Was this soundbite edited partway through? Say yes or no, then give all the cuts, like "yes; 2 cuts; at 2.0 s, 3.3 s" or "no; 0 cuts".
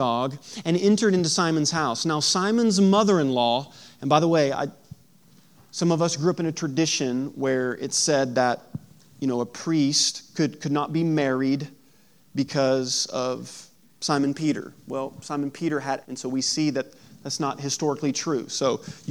yes; 1 cut; at 16.0 s